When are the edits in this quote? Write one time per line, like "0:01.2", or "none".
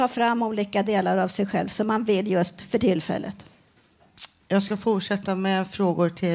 none